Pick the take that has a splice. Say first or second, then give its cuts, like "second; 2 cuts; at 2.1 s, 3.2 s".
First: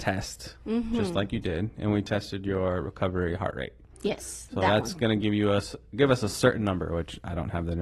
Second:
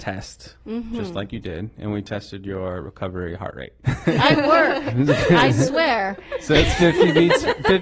second; 1 cut; at 3.8 s